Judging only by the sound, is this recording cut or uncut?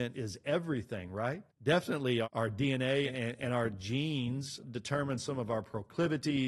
cut